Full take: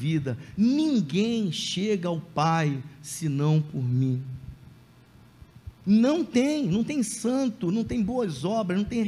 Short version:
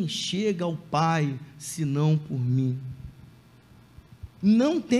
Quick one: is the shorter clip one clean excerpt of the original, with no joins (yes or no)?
yes